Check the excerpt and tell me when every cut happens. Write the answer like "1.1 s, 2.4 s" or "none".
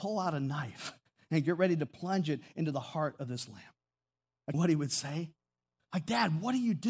4.5 s